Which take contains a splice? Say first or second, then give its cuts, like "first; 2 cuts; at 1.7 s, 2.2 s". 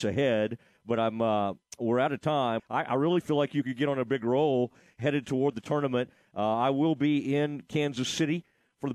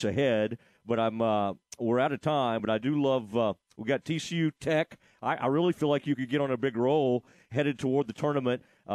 first; 1 cut; at 2.6 s